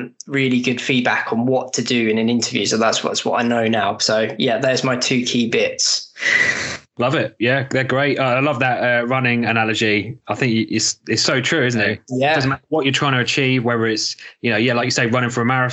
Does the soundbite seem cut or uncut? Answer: uncut